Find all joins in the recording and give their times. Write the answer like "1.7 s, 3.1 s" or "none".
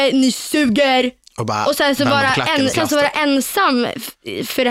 2.7 s

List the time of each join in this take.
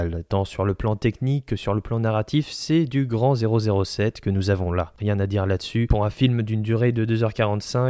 5.0 s

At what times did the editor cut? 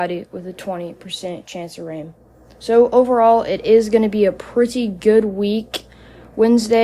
none

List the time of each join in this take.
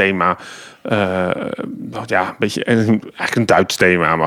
none

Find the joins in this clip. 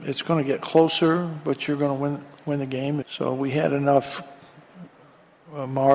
3.0 s

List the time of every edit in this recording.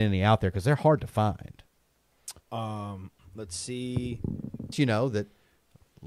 2.4 s, 4.7 s

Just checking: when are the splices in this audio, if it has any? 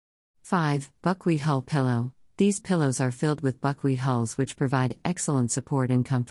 none

